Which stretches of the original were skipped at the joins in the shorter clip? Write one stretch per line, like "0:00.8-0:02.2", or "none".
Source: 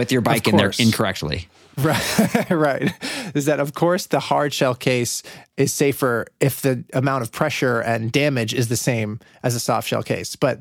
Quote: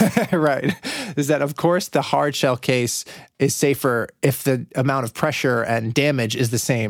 none